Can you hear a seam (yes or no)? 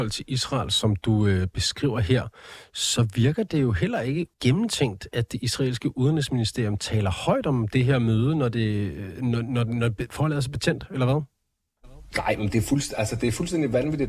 yes